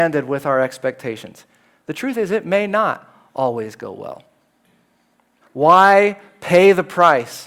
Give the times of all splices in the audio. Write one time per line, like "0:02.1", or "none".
0:05.4